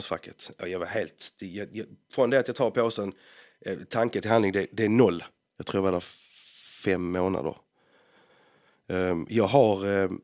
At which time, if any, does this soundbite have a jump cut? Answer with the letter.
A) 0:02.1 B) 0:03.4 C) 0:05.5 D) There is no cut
C